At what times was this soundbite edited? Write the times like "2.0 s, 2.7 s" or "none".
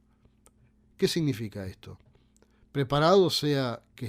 none